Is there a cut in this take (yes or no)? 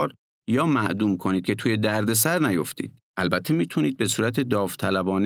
yes